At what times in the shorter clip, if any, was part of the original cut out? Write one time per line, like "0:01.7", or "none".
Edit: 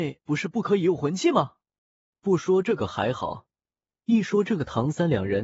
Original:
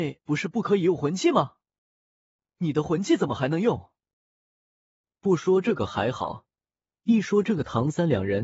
0:02.1